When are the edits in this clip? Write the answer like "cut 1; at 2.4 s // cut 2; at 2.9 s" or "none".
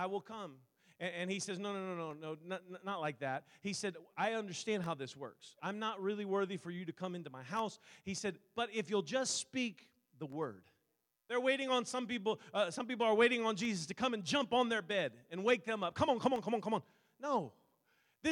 cut 1; at 11.2 s